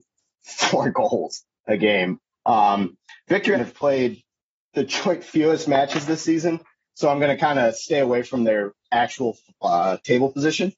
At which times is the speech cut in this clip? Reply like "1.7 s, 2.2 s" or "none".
3.5 s